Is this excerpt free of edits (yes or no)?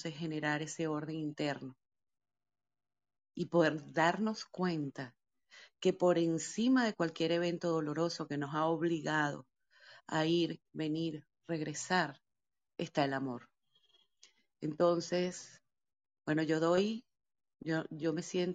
yes